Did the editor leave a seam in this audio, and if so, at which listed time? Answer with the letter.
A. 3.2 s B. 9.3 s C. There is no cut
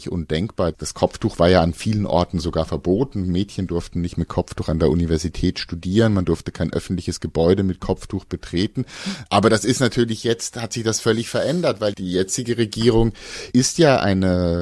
C